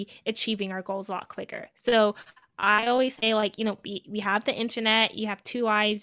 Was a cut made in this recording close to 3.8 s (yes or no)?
no